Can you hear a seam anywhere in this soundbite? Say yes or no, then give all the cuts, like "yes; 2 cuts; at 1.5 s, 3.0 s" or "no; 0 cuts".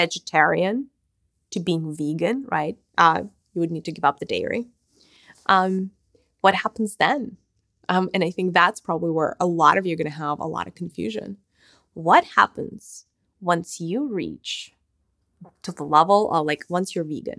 no; 0 cuts